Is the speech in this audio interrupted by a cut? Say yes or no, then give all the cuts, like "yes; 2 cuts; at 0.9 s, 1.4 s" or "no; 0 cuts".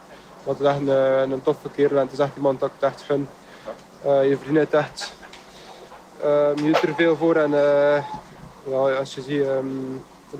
no; 0 cuts